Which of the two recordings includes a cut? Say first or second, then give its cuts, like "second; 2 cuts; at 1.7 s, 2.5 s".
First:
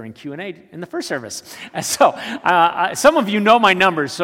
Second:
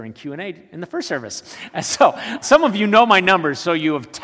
second; 1 cut; at 2.4 s